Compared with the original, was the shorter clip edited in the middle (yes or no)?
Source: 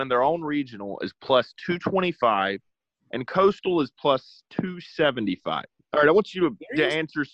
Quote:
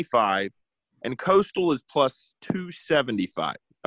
no